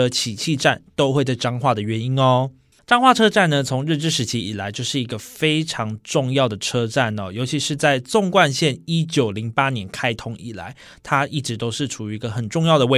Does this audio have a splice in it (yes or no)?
yes